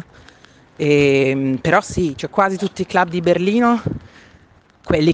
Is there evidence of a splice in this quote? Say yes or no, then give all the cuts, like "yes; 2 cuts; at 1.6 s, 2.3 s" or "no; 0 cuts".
no; 0 cuts